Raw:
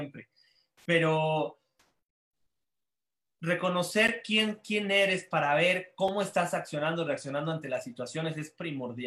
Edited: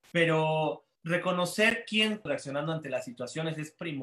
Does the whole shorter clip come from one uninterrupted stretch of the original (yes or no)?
no